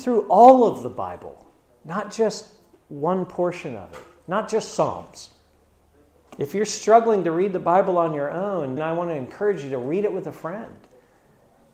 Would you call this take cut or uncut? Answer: cut